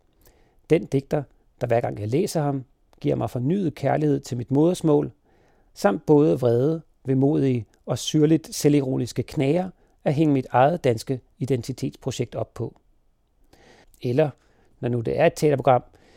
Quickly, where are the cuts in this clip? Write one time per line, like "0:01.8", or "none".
0:13.8